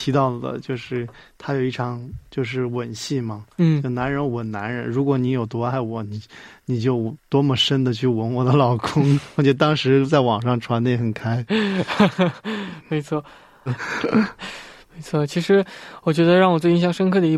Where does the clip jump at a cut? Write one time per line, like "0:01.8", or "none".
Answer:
0:13.7